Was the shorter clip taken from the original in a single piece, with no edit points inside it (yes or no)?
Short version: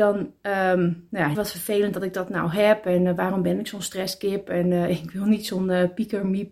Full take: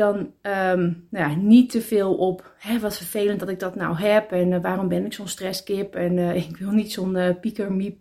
no